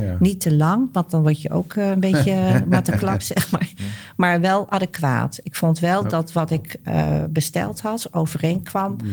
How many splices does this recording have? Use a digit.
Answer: 0